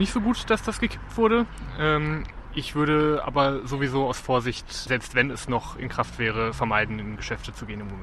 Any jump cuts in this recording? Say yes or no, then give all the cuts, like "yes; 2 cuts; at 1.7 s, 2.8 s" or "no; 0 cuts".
no; 0 cuts